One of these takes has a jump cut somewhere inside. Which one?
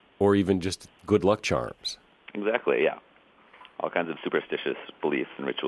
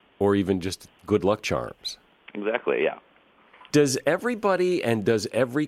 second; 1 cut; at 3.7 s

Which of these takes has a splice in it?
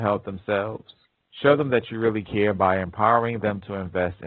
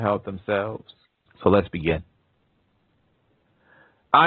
second; 1 cut; at 1.3 s

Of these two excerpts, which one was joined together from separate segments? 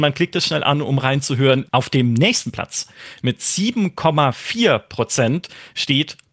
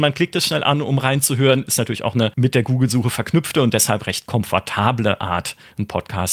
first; 1 cut; at 1.6 s

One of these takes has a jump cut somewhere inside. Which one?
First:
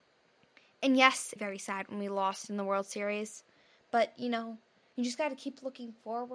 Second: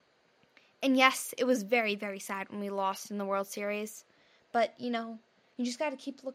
first; 1 cut; at 1.4 s

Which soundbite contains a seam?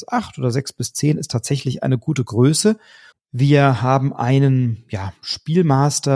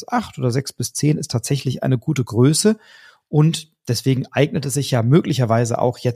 first; 1 cut; at 3.1 s

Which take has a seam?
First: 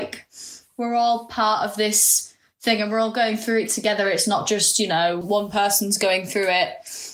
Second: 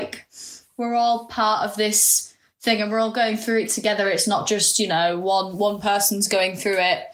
first; 1 cut; at 5.2 s

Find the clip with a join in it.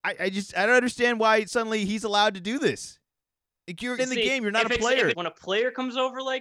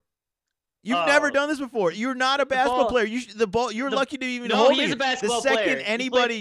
first; 2 cuts; at 4.0 s, 5.1 s

